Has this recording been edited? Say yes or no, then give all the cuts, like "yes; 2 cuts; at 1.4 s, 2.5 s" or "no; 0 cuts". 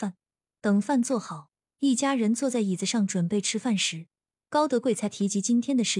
no; 0 cuts